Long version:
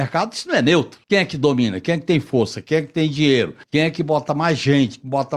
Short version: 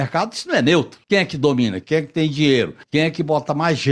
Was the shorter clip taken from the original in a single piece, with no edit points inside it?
no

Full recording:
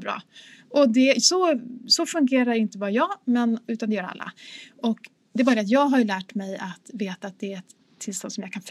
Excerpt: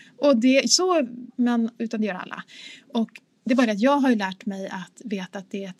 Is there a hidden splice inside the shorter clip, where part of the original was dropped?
yes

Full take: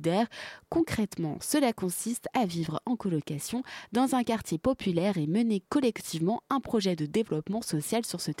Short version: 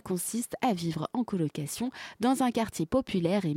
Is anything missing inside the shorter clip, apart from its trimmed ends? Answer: no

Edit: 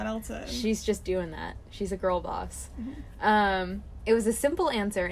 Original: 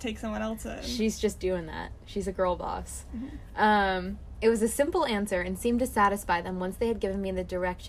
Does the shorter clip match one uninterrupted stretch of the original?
yes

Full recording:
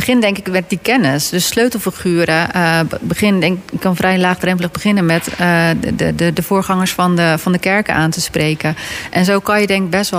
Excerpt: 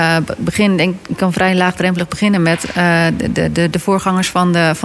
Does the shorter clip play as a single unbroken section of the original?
yes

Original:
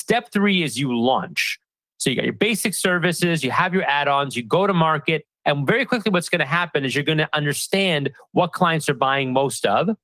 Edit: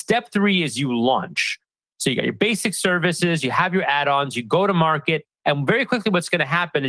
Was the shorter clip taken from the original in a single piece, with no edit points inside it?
yes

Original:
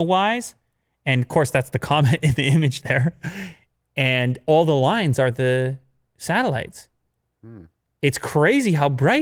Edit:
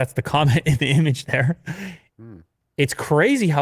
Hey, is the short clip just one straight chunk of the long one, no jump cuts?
no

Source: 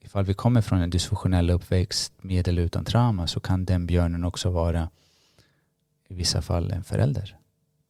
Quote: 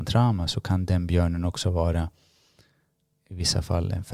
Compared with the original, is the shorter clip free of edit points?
yes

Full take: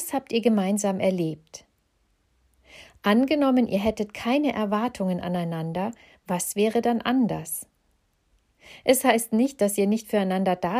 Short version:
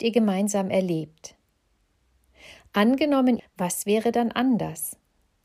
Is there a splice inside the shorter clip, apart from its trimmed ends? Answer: yes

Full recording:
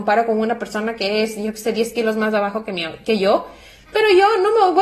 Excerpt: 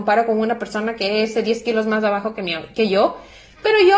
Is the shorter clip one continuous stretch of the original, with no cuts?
no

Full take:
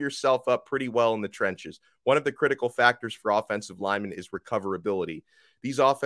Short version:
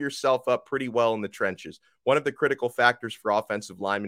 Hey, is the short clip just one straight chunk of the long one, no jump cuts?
yes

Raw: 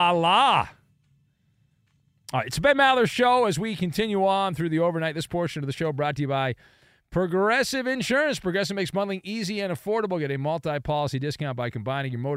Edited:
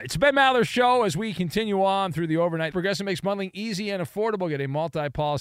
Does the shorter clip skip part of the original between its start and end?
yes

